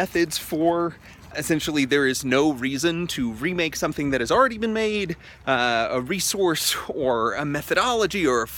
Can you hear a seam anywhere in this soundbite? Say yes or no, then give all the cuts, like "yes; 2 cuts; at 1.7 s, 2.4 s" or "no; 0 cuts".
yes; 1 cut; at 1.3 s